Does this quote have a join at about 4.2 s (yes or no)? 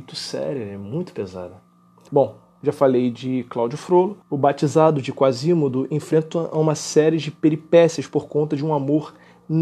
yes